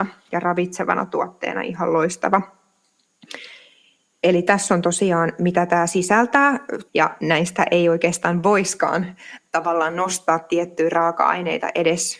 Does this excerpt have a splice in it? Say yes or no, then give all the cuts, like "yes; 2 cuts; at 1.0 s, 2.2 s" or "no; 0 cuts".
yes; 1 cut; at 6.9 s